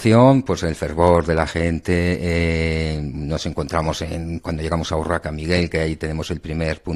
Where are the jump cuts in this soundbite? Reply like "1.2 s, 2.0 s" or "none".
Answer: 4.4 s